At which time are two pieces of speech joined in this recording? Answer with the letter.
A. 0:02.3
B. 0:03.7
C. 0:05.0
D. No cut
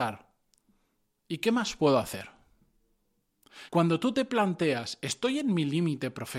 B